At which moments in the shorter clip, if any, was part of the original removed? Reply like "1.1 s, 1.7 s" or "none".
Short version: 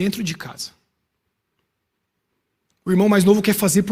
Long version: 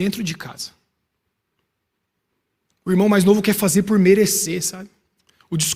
none